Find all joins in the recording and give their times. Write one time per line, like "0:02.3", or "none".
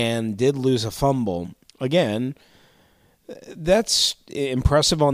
0:01.7